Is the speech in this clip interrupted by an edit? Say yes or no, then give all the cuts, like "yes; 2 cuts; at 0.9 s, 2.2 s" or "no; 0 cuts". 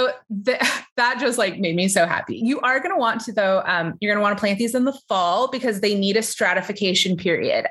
no; 0 cuts